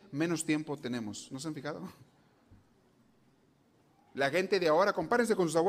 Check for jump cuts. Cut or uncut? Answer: uncut